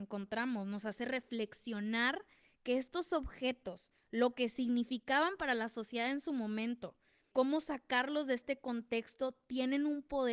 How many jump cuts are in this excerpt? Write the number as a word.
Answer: one